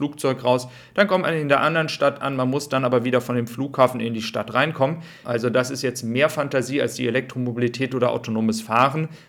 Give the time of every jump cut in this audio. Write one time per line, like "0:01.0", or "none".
0:05.2